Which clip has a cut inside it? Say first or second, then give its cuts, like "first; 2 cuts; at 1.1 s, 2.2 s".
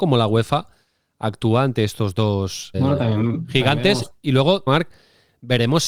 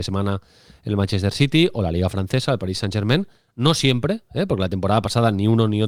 first; 2 cuts; at 2.7 s, 4.7 s